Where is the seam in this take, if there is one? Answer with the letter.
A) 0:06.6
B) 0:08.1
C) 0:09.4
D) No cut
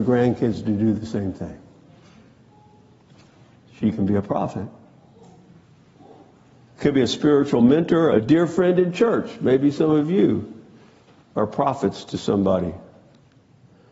B